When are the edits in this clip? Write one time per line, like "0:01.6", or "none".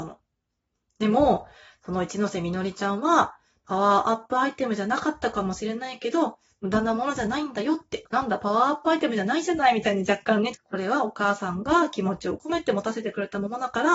0:08.1
0:10.5